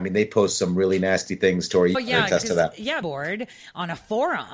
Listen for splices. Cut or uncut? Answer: cut